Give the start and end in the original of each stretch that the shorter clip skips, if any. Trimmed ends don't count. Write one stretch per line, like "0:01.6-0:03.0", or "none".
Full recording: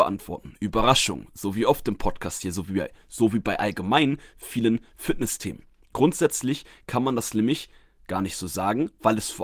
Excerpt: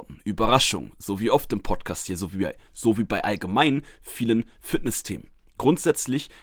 none